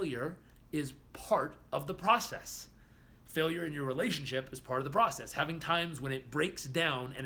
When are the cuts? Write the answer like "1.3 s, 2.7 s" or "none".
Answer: none